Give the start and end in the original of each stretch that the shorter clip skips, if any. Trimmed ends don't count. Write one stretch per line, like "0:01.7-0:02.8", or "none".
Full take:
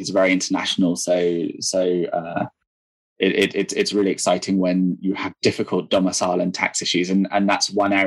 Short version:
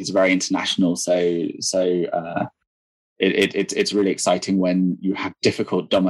none